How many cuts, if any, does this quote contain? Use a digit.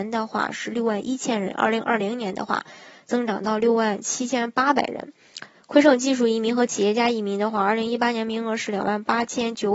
0